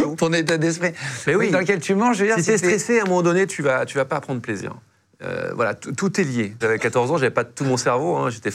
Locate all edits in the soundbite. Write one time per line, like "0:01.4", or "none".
0:06.6